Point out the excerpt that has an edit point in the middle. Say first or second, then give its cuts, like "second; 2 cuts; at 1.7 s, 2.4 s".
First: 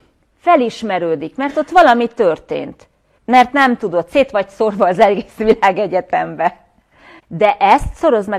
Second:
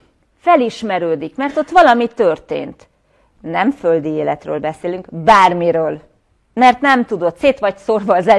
first; 2 cuts; at 3.2 s, 7.2 s